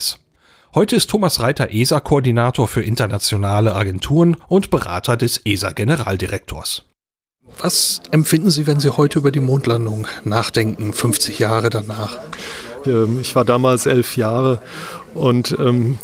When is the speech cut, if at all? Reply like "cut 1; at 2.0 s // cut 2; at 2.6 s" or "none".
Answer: cut 1; at 12.8 s

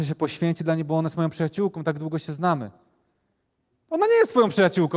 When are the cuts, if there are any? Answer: none

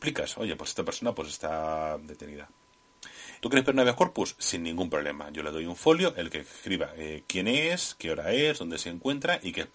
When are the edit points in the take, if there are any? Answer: cut 1; at 3.4 s

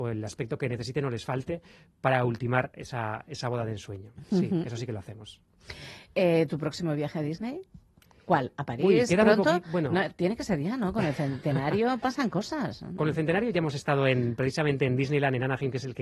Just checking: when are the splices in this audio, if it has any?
none

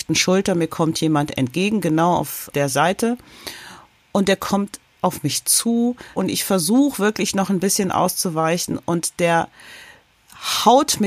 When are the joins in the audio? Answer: cut 1; at 4.0 s

